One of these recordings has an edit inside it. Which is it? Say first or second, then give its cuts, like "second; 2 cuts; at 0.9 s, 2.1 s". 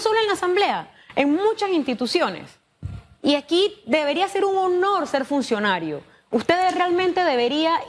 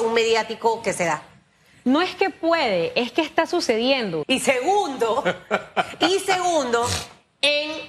second; 1 cut; at 4.2 s